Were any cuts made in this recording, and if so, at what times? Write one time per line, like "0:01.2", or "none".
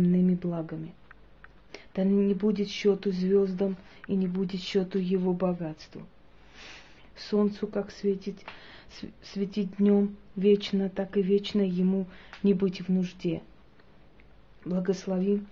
0:07.0